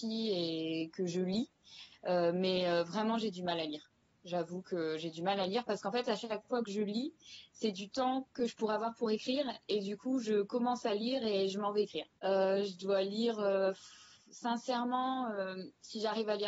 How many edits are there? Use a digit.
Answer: 1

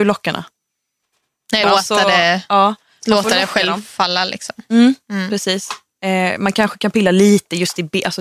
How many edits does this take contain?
1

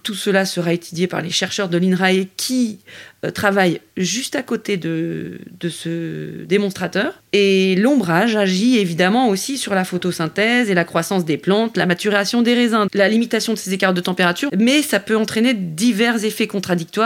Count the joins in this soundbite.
2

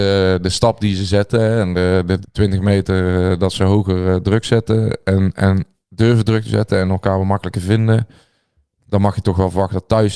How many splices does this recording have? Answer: 1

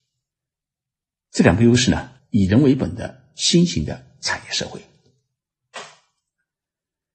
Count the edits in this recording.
1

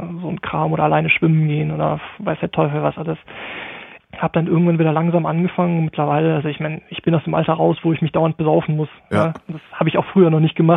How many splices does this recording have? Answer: 1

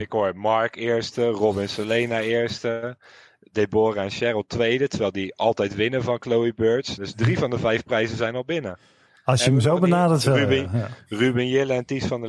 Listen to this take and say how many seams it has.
1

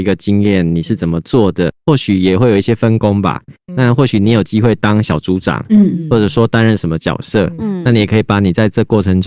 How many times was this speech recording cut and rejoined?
1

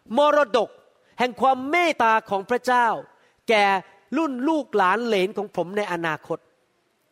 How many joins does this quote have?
1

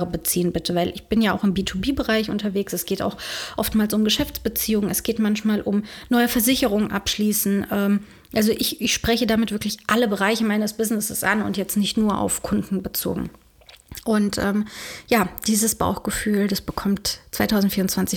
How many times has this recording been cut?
0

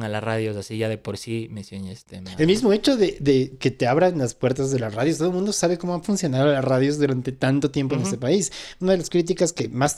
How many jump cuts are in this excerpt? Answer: 0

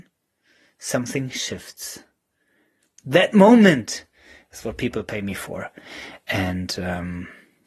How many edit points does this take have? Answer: 1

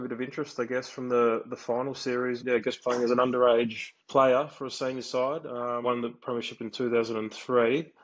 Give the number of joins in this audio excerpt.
3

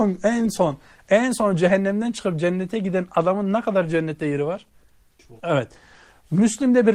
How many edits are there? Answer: 1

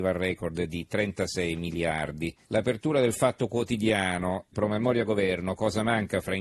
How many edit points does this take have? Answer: 2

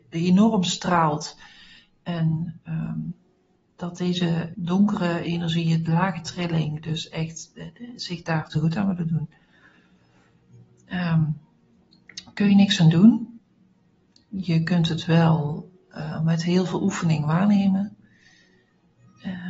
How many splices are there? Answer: 1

